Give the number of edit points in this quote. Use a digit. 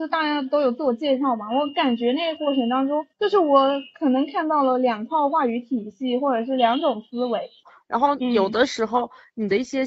2